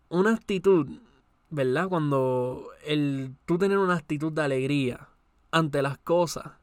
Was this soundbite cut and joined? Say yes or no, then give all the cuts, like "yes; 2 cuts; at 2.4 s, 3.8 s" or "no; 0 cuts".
no; 0 cuts